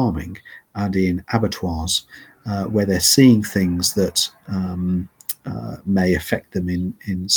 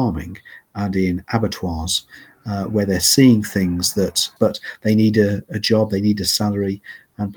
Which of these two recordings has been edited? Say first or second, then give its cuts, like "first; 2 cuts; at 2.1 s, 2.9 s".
second; 1 cut; at 4.4 s